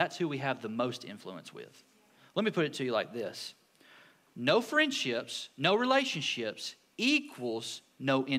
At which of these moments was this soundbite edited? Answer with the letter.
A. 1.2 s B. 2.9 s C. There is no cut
C